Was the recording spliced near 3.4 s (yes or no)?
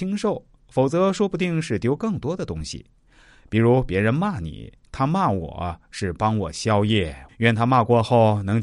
no